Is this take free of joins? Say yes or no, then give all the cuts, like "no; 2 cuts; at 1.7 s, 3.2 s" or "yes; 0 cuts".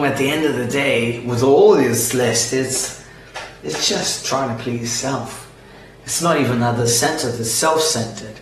yes; 0 cuts